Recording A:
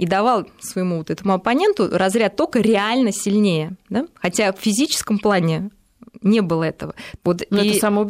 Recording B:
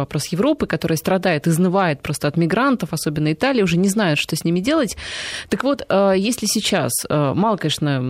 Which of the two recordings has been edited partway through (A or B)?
A